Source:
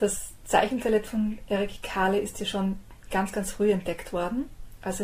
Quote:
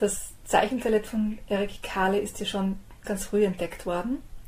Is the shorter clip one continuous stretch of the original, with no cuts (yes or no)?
no